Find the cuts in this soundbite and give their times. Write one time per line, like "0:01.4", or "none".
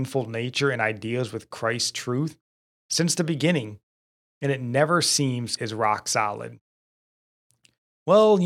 0:05.6